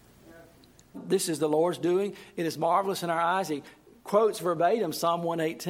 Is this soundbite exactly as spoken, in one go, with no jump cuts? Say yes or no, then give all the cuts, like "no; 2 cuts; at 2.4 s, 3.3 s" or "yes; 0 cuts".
no; 1 cut; at 0.9 s